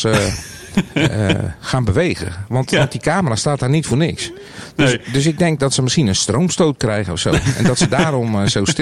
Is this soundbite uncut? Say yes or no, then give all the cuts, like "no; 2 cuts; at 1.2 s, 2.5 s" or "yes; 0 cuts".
yes; 0 cuts